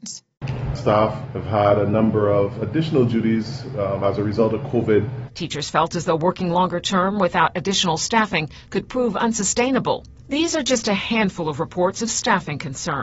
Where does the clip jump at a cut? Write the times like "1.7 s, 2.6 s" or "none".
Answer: 5.3 s, 10.2 s